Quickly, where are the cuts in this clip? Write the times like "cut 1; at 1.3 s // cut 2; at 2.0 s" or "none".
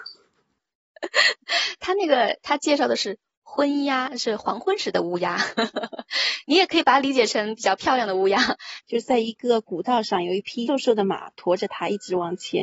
cut 1; at 8.8 s // cut 2; at 10.7 s